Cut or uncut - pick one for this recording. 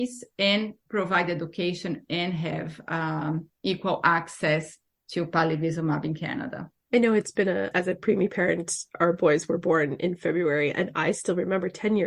cut